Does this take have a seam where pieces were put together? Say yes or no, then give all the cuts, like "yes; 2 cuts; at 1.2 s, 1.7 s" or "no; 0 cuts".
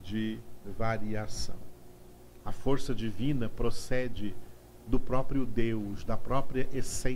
yes; 1 cut; at 2.4 s